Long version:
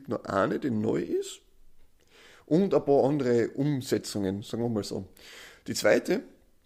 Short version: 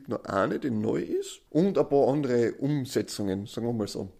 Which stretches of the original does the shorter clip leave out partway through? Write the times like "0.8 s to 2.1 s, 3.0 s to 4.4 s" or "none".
1.5 s to 2.4 s